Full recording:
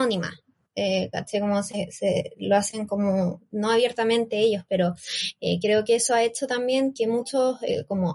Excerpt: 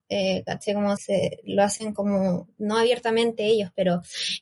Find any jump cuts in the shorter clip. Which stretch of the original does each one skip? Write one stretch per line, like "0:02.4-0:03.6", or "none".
0:01.6-0:01.9